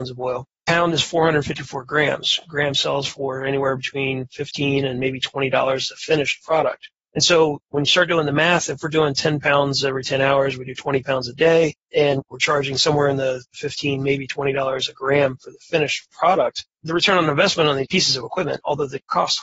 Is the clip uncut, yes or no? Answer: yes